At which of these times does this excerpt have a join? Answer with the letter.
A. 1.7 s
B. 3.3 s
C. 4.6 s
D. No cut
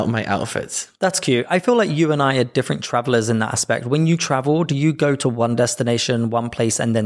D